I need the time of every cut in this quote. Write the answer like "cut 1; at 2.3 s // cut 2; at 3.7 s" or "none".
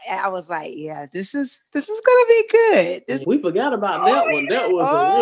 cut 1; at 3.2 s